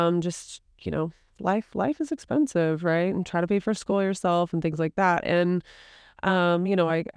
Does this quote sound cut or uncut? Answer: uncut